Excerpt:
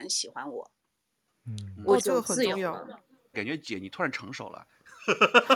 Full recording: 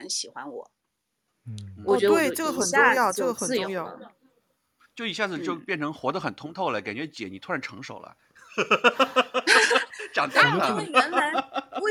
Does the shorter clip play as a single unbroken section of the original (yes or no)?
no